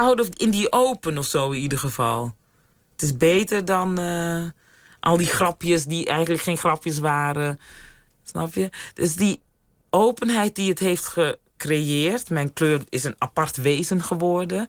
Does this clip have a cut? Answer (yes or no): no